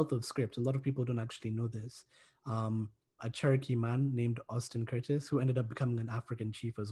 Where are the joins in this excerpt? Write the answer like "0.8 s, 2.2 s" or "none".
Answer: 3.2 s